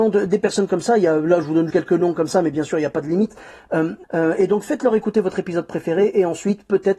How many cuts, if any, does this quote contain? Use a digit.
2